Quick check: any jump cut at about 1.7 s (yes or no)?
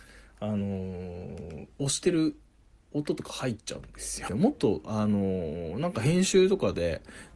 yes